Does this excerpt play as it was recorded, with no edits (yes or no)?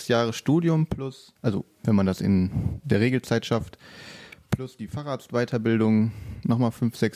no